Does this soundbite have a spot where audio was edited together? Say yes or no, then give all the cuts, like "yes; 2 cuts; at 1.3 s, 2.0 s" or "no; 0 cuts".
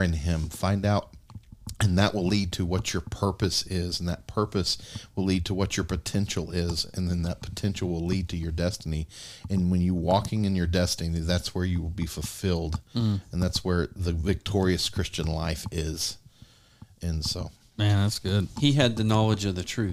no; 0 cuts